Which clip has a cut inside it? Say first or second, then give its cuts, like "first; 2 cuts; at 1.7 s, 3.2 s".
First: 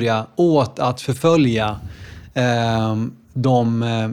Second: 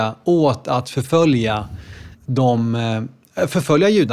second; 1 cut; at 2.1 s